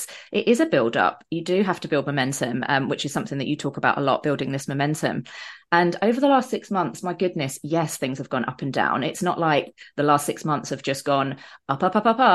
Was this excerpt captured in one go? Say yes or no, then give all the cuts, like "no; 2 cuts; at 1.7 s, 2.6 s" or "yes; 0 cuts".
yes; 0 cuts